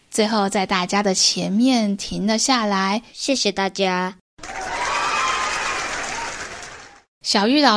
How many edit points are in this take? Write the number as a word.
one